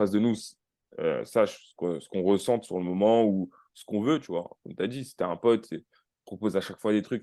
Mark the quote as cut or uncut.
uncut